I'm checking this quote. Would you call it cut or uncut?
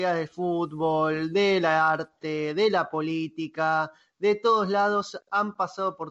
uncut